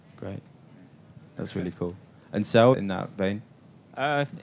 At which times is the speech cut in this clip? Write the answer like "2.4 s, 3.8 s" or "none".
1.4 s, 2.7 s